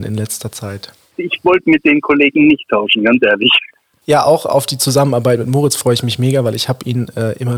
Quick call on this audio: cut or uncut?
uncut